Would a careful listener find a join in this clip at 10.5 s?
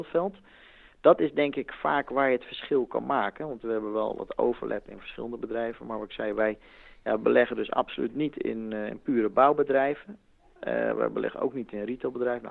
no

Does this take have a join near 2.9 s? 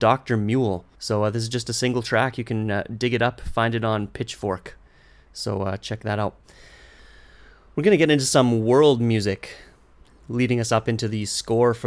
no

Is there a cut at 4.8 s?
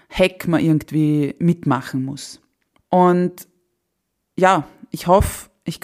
no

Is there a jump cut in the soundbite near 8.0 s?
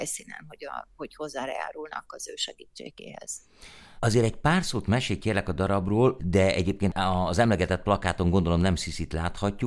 no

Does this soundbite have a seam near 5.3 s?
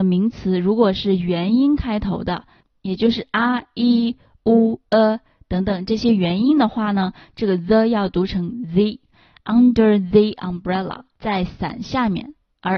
no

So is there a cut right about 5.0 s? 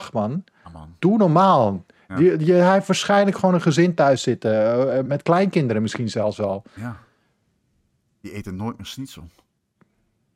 yes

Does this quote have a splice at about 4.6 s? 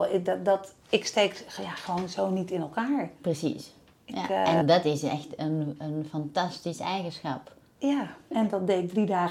yes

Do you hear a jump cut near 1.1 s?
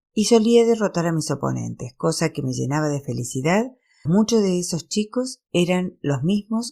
no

